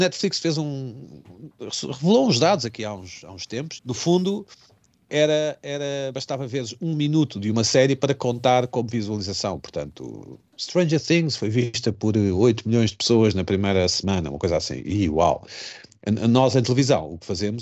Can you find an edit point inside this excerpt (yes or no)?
yes